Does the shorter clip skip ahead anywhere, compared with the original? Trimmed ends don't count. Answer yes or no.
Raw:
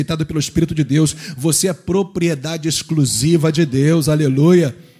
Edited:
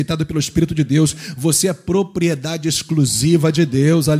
no